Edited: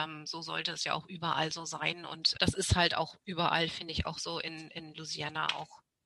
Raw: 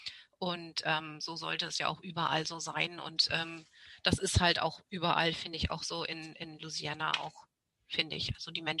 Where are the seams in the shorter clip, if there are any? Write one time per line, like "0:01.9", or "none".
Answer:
0:02.3